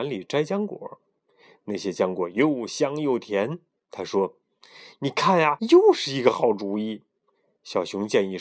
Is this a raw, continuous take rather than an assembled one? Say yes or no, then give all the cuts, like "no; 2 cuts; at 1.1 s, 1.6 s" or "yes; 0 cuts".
no; 1 cut; at 5.6 s